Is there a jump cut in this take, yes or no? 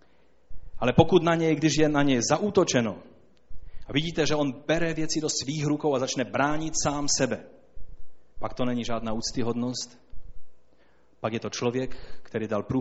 yes